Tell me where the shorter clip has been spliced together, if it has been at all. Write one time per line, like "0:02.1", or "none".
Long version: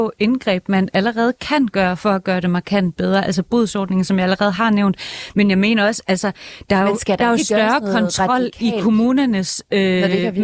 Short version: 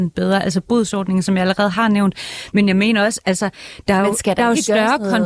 none